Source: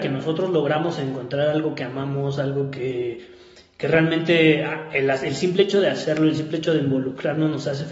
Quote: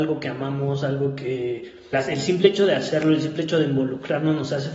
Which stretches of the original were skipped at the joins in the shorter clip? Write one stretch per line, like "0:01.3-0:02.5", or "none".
0:03.5-0:05.1